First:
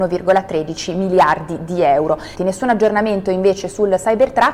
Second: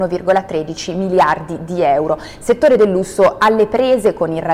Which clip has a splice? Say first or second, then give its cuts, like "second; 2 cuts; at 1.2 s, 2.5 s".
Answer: first; 1 cut; at 2.4 s